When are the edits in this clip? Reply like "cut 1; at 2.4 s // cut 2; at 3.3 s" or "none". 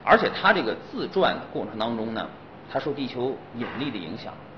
none